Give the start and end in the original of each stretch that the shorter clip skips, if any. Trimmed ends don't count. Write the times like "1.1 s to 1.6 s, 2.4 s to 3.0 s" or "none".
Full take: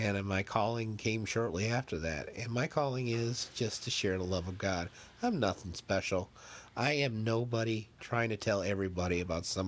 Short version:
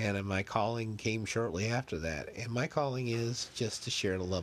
none